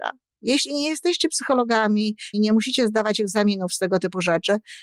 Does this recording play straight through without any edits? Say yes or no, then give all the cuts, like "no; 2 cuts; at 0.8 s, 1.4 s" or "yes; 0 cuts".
no; 1 cut; at 2.3 s